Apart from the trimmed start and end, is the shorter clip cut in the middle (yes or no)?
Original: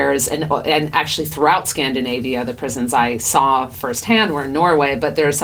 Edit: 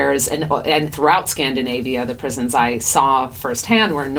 yes